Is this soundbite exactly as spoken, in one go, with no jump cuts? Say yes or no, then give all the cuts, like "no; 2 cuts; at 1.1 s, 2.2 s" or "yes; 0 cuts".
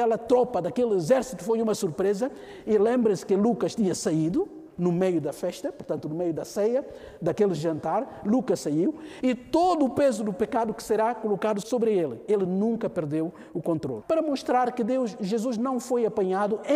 no; 3 cuts; at 9.2 s, 11.6 s, 14.0 s